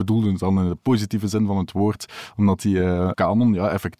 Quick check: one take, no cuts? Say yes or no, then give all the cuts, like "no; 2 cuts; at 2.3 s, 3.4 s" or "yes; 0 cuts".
yes; 0 cuts